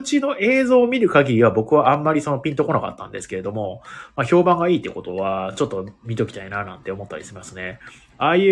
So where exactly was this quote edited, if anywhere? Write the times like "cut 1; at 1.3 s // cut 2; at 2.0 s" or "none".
none